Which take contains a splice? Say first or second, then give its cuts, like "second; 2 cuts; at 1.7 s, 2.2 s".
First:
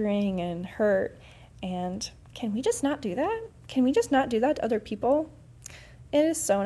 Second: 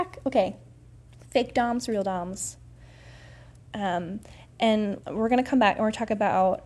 second; 2 cuts; at 3.6 s, 5.0 s